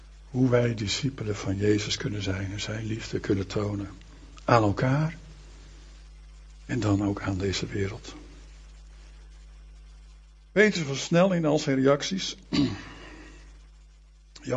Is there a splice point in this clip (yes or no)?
no